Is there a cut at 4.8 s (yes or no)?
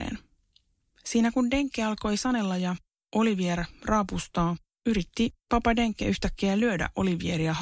no